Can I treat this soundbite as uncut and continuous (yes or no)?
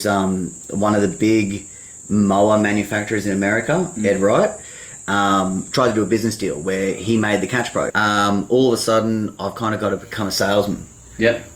no